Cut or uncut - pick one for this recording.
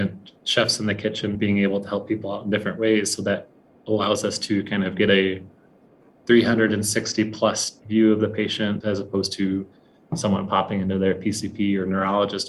cut